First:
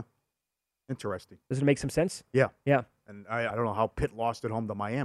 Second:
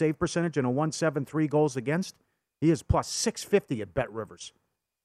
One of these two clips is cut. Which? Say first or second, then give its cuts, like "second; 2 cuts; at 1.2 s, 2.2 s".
first; 1 cut; at 3.5 s